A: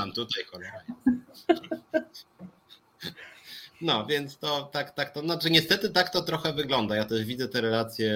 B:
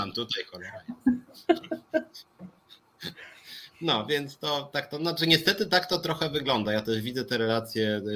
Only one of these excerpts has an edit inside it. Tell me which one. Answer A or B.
B